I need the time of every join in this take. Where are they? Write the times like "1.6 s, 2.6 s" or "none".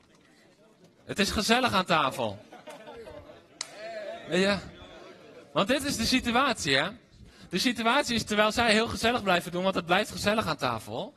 none